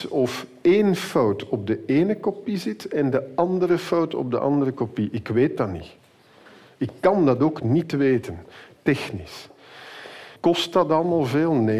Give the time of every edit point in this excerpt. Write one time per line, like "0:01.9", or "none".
0:10.4